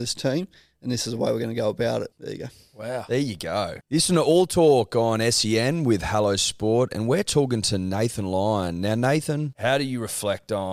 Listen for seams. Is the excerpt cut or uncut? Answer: cut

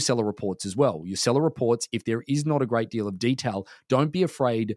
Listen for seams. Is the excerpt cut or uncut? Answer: uncut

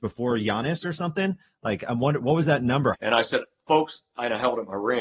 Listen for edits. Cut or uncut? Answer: cut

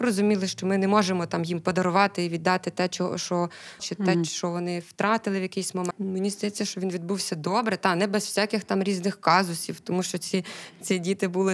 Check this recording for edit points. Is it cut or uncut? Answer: cut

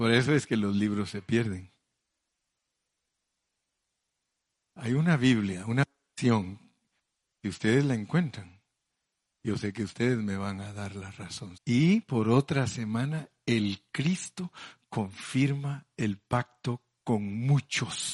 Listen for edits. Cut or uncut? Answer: cut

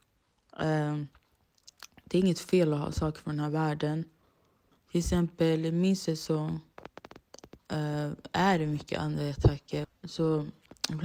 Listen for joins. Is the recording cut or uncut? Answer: cut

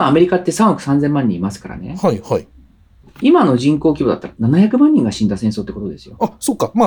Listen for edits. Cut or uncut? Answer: uncut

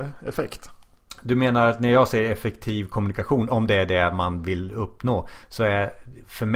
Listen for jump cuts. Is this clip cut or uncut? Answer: uncut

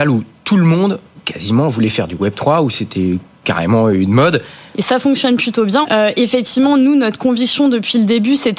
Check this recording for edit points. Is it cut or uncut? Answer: cut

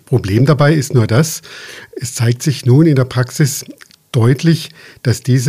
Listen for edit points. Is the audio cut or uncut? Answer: uncut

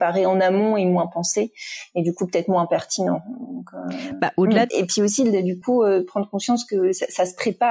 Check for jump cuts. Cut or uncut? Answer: cut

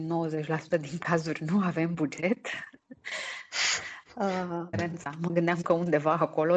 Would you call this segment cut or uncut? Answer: cut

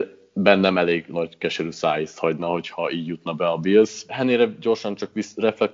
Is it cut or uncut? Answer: cut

